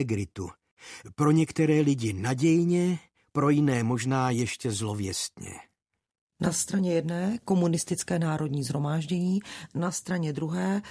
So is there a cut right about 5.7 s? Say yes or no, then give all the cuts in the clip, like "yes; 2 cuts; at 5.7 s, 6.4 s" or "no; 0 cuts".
no; 0 cuts